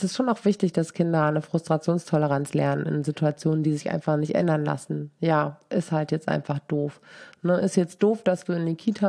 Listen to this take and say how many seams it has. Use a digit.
0